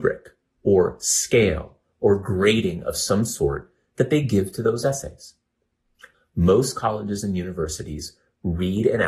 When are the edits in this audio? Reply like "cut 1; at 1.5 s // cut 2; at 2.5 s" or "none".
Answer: cut 1; at 6.1 s